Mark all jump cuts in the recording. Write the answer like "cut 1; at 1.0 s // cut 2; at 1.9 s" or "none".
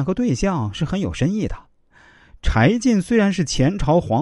none